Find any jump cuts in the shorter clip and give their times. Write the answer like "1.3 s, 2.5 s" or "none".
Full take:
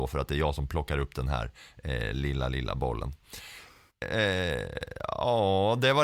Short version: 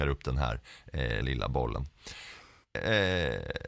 1.2 s